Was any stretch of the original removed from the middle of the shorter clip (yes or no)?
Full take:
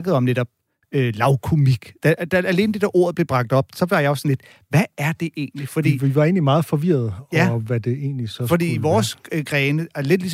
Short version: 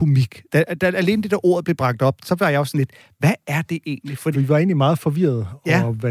yes